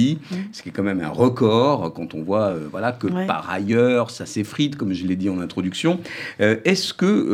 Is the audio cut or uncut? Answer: uncut